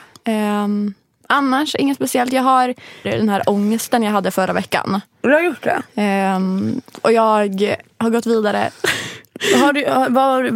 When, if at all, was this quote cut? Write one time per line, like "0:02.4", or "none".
0:03.0